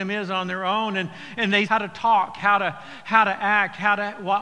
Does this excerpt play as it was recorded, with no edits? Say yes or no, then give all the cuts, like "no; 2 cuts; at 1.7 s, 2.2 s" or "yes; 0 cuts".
no; 1 cut; at 1.7 s